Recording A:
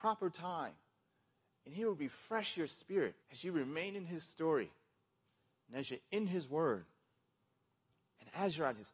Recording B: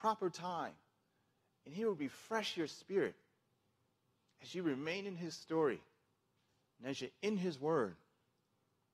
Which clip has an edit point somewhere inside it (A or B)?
A